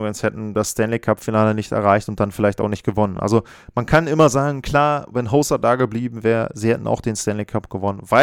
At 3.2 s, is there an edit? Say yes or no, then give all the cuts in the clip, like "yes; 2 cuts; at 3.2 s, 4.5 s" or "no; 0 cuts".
no; 0 cuts